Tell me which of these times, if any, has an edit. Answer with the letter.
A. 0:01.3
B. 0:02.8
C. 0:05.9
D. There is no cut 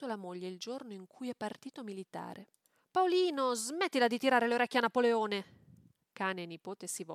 D